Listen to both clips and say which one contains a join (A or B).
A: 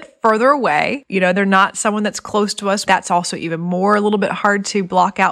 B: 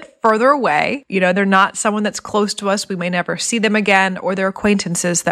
A